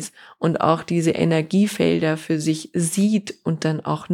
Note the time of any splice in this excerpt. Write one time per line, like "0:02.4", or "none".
none